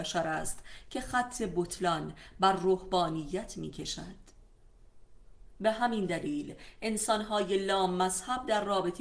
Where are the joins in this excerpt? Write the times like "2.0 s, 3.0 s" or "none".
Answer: 5.5 s